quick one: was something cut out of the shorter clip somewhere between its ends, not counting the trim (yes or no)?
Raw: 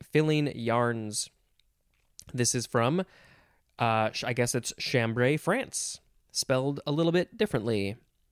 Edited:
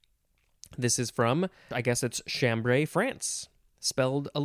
yes